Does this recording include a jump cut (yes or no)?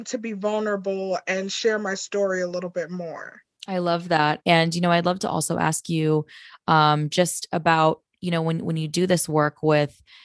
yes